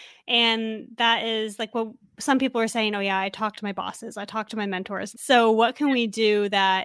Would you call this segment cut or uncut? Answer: cut